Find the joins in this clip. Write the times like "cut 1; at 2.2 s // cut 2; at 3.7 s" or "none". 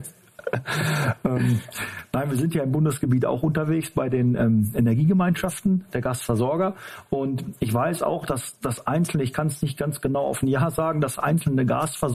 none